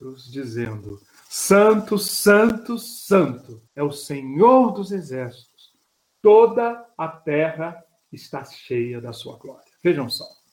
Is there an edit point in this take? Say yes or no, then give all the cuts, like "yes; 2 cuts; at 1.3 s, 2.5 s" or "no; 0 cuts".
yes; 1 cut; at 3.7 s